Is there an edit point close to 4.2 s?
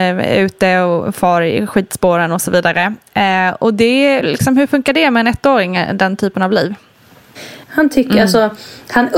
yes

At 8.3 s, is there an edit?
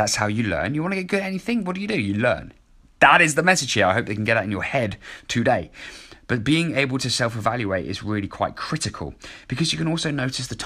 no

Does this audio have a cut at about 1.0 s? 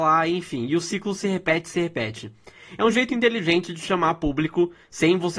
no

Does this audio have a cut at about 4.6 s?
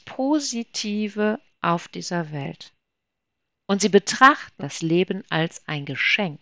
yes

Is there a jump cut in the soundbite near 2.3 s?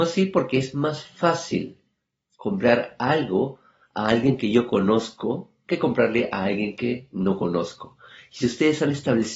no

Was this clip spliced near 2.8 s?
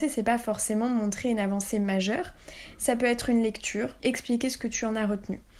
no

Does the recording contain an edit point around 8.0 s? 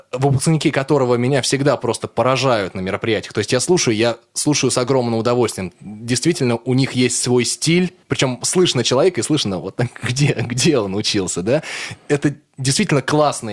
yes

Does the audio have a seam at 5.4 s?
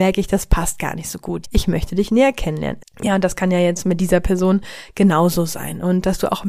no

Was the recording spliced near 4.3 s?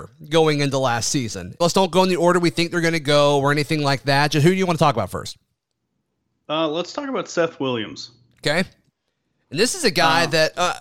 no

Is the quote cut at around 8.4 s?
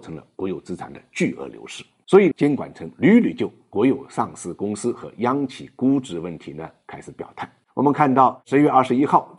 no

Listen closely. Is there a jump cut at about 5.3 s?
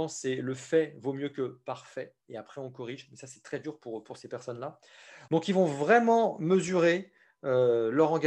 yes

